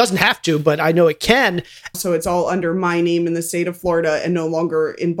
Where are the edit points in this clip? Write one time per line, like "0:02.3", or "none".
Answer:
0:01.9